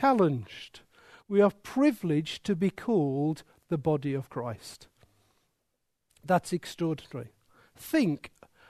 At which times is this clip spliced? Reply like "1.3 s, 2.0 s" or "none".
none